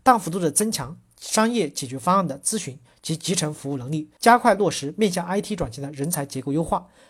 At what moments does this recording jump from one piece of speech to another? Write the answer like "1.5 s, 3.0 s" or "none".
4.2 s